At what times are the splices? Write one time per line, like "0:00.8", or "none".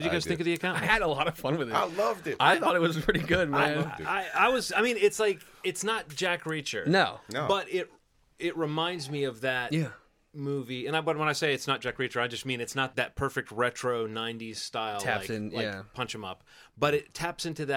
0:12.9